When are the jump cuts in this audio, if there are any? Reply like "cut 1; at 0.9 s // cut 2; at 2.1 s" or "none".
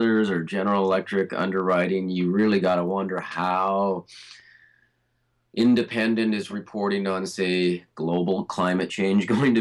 none